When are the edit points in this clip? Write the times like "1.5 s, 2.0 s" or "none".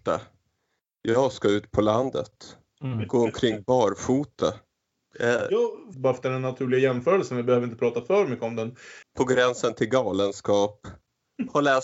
5.9 s, 9.0 s